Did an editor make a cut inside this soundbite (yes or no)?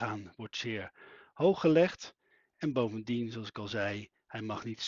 no